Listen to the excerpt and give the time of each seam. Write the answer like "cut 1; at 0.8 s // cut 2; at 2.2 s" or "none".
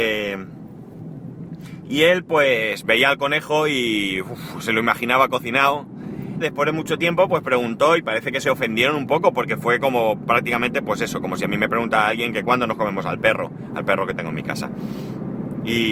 cut 1; at 6.4 s